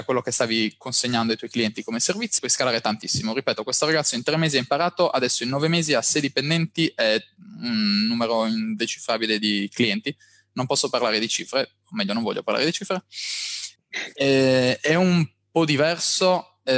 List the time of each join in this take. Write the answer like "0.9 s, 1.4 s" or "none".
2.4 s, 13.8 s